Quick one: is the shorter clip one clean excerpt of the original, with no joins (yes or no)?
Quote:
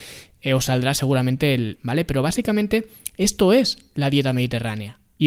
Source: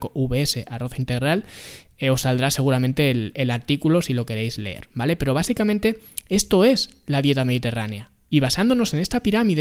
no